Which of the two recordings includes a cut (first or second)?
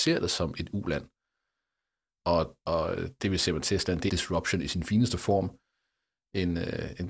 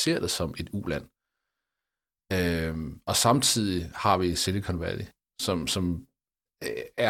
first